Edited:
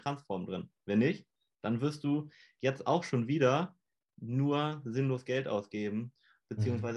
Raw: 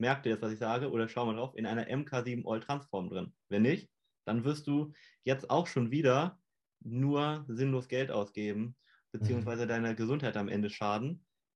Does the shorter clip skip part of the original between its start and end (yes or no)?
no